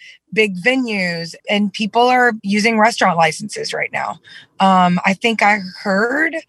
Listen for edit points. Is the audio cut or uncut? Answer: cut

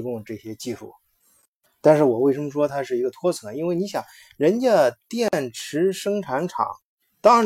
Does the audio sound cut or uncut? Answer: uncut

